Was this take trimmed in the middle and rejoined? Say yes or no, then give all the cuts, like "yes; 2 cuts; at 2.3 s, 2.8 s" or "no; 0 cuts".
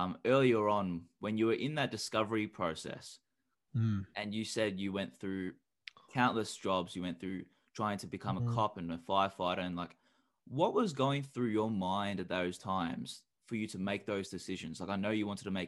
yes; 1 cut; at 3.5 s